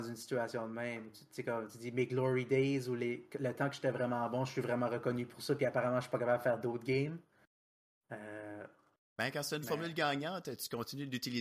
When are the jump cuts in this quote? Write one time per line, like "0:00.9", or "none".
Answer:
none

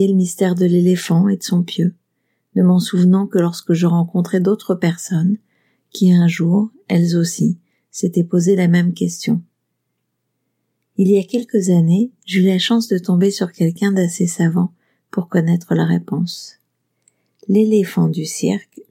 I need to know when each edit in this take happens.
none

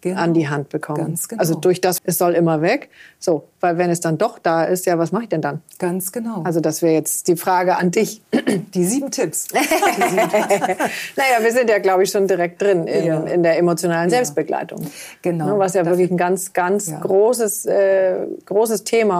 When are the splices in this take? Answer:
0:02.0

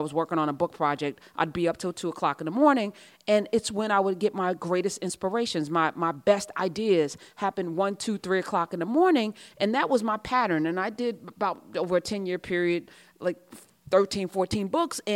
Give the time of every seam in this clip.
none

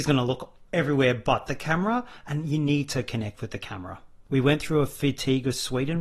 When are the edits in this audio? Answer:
0:04.3

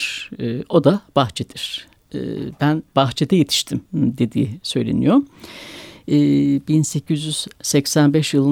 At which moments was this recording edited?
0:03.9

